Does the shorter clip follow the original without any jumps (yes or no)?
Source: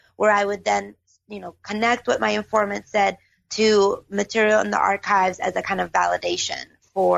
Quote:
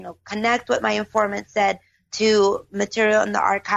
yes